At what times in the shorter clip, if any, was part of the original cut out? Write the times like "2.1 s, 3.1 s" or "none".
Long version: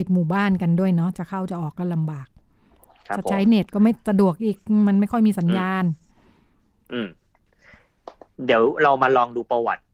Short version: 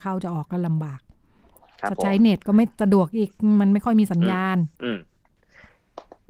4.7 s